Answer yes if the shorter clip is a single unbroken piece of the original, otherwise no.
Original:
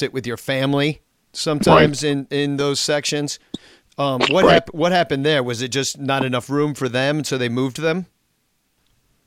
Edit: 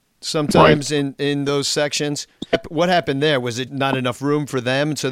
no